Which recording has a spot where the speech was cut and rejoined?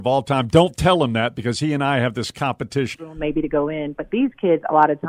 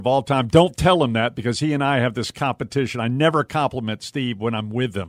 first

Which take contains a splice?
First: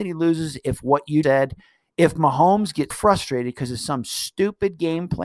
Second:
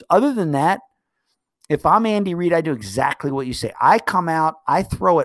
first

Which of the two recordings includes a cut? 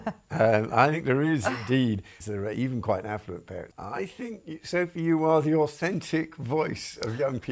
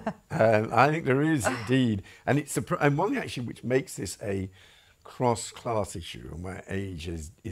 first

